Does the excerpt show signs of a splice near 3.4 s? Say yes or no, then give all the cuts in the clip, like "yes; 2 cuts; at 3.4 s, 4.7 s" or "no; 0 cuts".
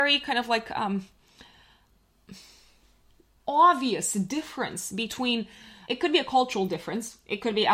yes; 2 cuts; at 3.4 s, 5.8 s